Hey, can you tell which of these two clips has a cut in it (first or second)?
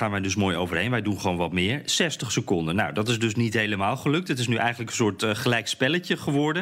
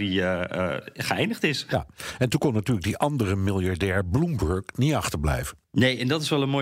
second